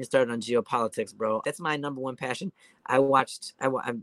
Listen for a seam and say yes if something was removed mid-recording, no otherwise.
yes